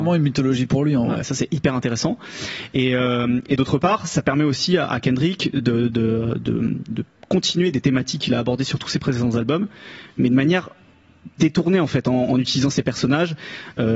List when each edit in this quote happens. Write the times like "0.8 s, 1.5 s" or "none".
1.2 s